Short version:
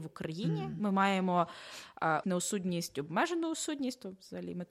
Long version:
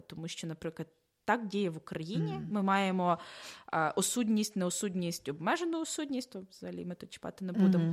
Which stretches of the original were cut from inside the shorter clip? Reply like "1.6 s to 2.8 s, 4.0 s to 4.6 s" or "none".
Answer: 3.9 s to 4.5 s